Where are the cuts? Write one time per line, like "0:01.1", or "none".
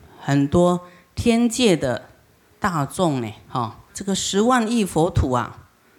0:03.9